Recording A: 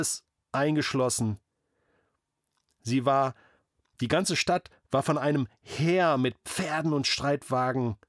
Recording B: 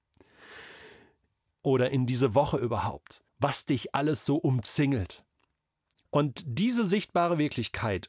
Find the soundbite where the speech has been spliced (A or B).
B